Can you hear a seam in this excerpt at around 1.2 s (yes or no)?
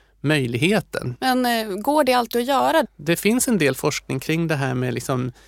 yes